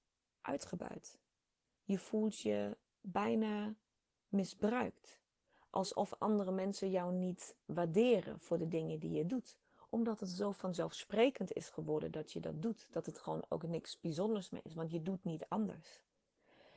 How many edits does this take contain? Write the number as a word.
zero